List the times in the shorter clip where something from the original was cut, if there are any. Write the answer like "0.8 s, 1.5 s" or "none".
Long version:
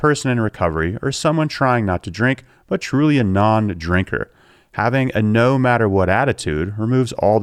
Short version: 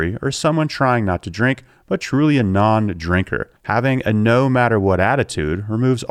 3.6 s